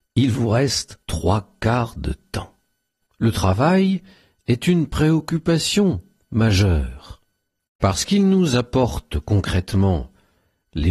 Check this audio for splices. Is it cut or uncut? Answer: cut